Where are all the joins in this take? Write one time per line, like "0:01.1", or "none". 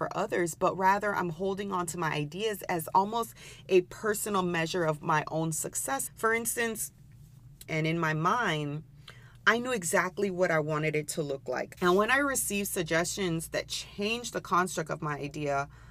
0:06.1
0:07.7
0:11.8